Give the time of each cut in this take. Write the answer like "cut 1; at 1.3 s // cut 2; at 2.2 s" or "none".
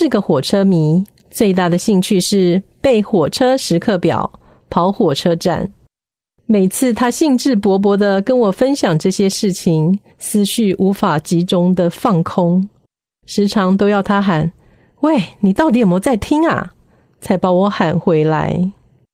cut 1; at 10.1 s